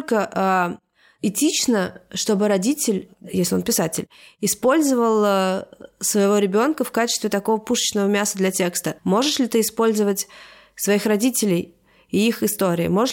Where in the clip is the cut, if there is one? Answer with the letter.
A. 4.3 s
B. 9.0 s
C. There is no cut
B